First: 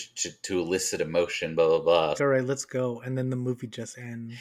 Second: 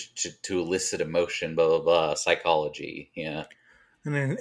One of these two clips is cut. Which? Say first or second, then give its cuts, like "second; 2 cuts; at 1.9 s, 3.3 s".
first; 1 cut; at 2.2 s